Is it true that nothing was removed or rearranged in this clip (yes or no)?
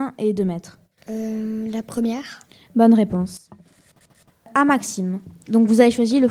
yes